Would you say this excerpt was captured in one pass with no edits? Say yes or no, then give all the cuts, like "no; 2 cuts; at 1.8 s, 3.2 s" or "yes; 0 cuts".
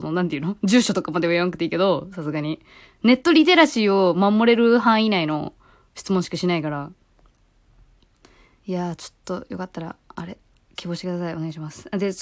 yes; 0 cuts